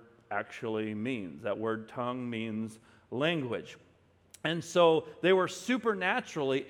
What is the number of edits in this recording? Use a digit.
0